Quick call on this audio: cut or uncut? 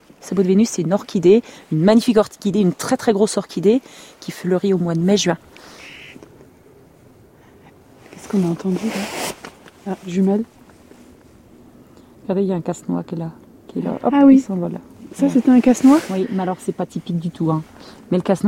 uncut